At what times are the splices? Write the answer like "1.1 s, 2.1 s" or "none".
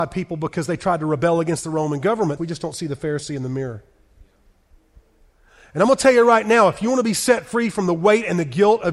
2.4 s